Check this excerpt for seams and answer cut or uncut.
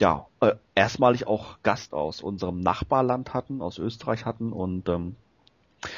cut